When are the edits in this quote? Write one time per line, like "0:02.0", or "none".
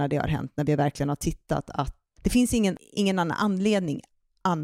0:02.2